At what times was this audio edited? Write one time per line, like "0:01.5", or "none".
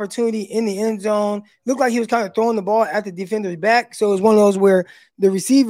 none

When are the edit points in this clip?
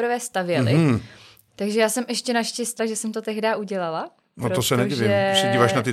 0:01.5
0:02.8

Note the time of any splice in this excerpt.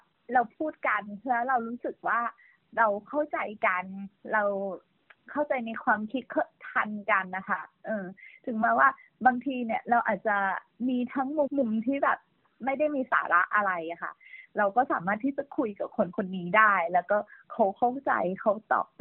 0:11.5

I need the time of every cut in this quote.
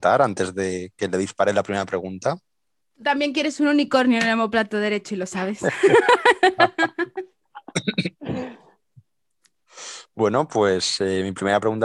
0:02.8

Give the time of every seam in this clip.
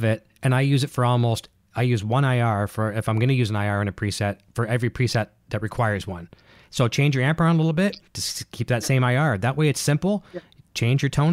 0:08.1

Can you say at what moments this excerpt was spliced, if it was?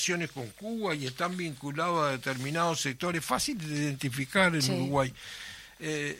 none

